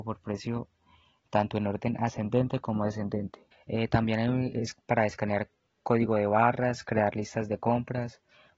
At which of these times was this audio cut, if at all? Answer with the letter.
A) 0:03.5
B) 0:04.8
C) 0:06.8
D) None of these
A